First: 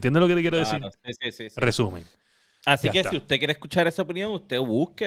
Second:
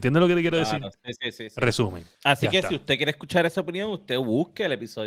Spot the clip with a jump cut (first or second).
second